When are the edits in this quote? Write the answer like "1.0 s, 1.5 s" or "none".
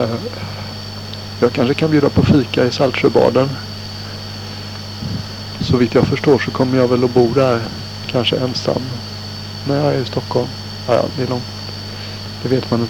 11.1 s